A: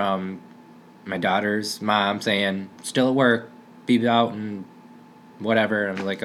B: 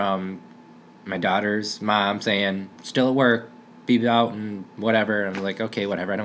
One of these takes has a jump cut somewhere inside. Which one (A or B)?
B